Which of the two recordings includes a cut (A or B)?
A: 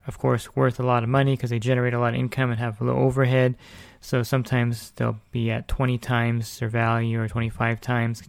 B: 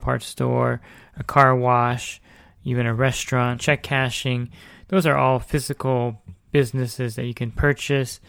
B